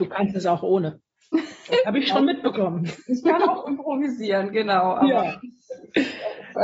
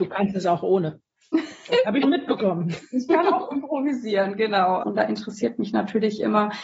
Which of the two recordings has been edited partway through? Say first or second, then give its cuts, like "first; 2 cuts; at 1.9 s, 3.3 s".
second; 2 cuts; at 2.0 s, 4.8 s